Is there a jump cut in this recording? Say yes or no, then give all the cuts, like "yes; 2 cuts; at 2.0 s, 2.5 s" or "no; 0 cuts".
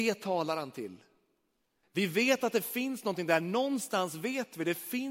yes; 1 cut; at 1.8 s